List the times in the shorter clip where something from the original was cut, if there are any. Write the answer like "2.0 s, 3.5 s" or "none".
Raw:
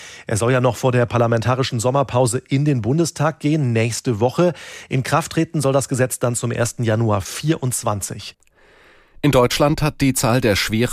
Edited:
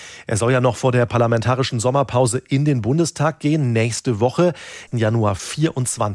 4.9 s